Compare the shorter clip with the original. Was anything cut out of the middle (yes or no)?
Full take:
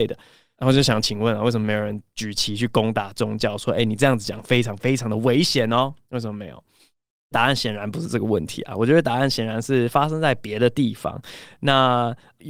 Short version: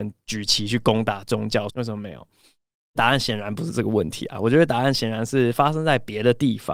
yes